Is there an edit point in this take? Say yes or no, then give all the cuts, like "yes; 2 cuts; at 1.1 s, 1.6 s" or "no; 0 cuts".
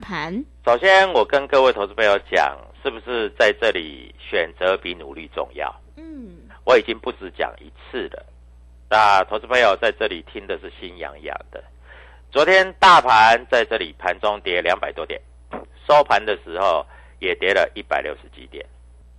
no; 0 cuts